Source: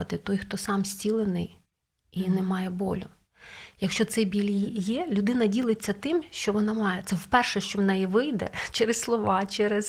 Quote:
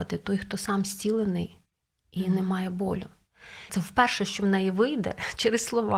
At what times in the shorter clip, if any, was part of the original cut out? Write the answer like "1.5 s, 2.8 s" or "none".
3.7 s